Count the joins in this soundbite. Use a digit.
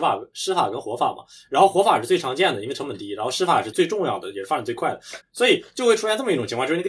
2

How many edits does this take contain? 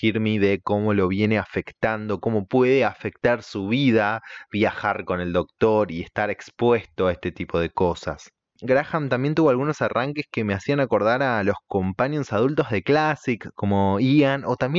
1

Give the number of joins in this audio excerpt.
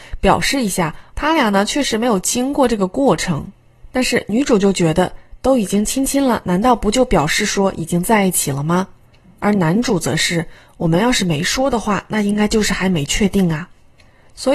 1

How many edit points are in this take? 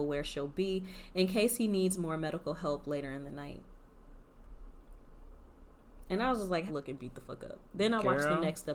1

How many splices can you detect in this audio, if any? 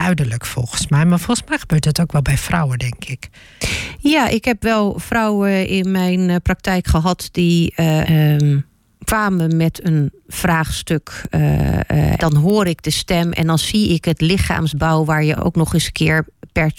3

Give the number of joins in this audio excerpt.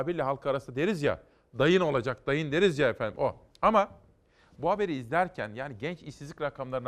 0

